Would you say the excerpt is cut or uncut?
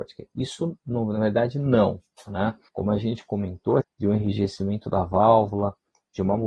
cut